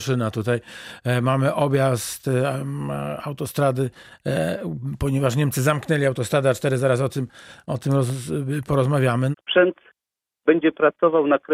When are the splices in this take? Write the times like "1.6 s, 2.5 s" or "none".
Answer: 9.3 s